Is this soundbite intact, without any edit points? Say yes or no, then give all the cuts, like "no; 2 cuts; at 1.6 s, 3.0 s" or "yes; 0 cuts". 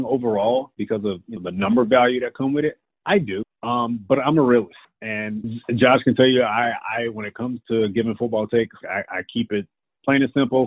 no; 1 cut; at 8.8 s